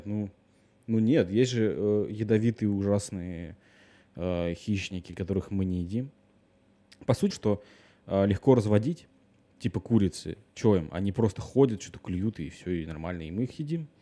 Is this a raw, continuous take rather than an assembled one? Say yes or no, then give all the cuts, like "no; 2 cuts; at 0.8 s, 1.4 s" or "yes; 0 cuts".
no; 1 cut; at 7.3 s